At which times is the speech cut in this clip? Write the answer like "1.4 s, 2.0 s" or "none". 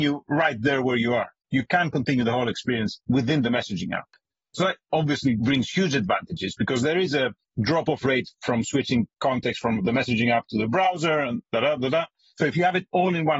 1.4 s